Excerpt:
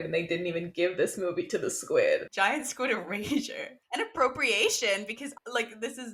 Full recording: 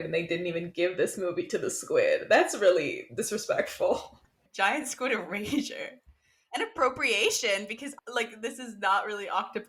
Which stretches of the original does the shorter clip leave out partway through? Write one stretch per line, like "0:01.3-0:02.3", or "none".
0:02.3-0:04.5
0:06.0-0:06.4